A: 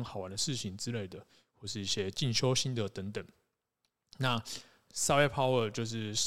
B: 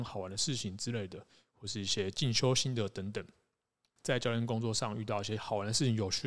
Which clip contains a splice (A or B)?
B